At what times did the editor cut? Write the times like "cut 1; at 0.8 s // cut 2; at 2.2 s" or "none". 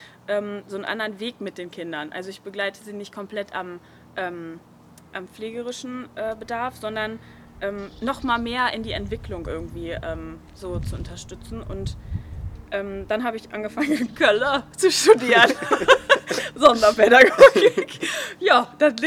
none